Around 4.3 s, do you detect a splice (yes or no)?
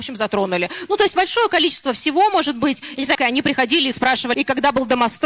yes